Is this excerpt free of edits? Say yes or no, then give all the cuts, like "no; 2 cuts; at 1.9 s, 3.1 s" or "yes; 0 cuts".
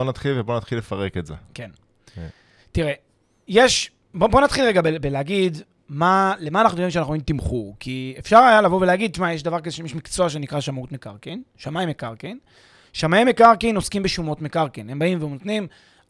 yes; 0 cuts